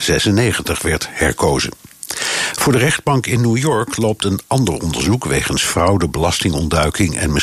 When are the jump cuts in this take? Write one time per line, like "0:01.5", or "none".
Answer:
none

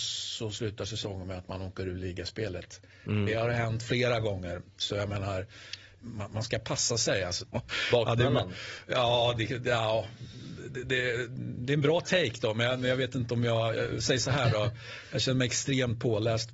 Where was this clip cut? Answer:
0:06.0
0:07.4

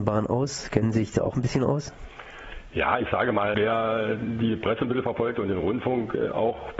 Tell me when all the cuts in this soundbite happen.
0:03.5

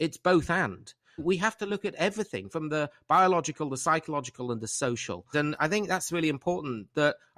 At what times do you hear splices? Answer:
0:01.2
0:05.3

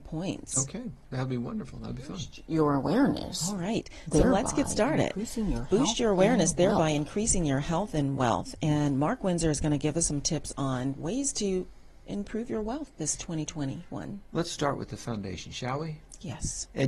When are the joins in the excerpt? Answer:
none

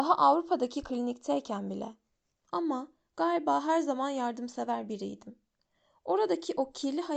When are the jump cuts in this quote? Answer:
0:02.5

